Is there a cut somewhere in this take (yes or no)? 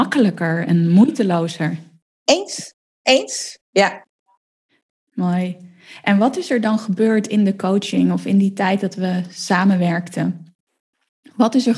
yes